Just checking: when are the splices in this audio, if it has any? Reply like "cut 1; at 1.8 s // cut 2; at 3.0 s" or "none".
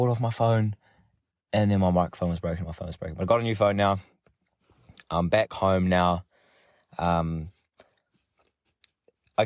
none

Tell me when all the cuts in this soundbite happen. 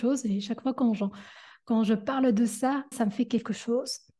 cut 1; at 2.9 s

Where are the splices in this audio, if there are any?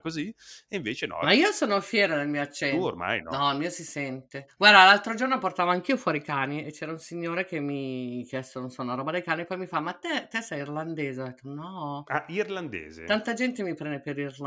none

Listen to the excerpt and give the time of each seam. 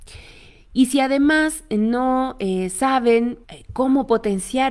cut 1; at 3.4 s

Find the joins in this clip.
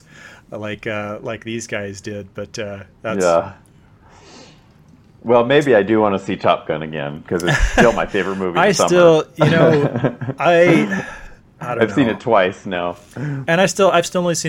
cut 1; at 2.9 s

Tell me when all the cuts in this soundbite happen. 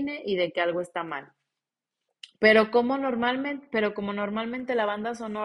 cut 1; at 2.4 s

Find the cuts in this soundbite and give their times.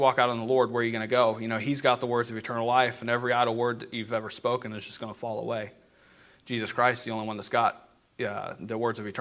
none

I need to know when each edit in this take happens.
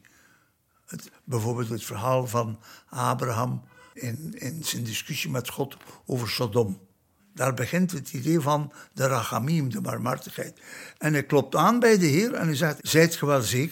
cut 1; at 4.0 s // cut 2; at 7.2 s // cut 3; at 12.8 s

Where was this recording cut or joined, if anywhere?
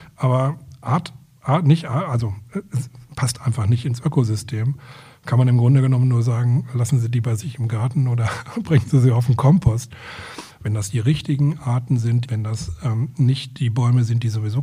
cut 1; at 10.5 s // cut 2; at 12.2 s

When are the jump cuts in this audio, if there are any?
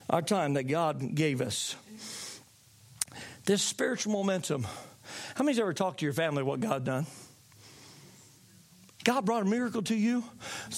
none

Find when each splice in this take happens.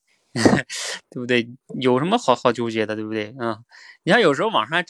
none

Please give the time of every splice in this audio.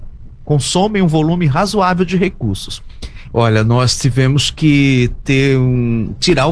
cut 1; at 3.3 s

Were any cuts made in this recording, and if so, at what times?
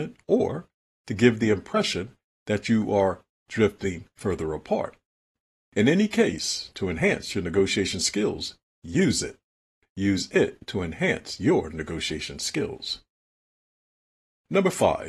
cut 1; at 9.8 s

